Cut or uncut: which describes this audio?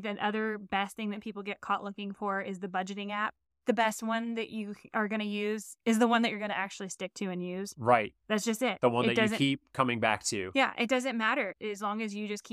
uncut